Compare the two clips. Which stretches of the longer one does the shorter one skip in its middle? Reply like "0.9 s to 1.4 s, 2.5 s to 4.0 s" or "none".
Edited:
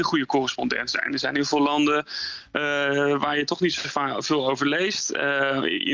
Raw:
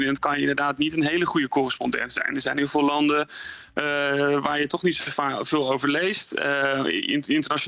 none